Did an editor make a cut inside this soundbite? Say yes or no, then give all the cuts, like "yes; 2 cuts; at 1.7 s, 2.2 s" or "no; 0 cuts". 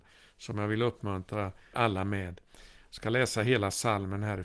yes; 1 cut; at 1.7 s